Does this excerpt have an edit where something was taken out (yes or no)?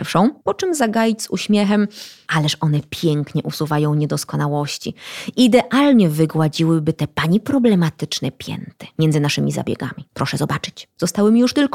yes